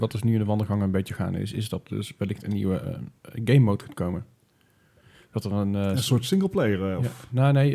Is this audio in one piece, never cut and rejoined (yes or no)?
no